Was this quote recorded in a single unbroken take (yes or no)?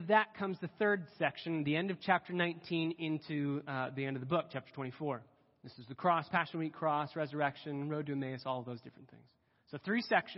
yes